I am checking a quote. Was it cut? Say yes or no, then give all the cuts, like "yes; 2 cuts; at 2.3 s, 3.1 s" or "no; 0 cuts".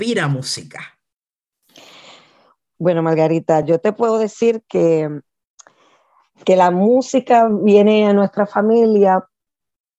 no; 0 cuts